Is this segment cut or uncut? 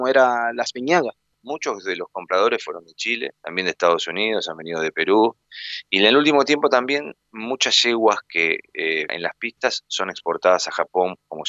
cut